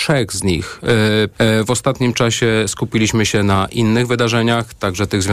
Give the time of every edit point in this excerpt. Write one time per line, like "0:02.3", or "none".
0:01.3